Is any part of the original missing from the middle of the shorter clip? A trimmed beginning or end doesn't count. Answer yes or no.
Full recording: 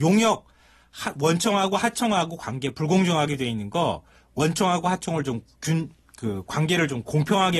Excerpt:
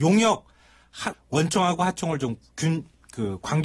yes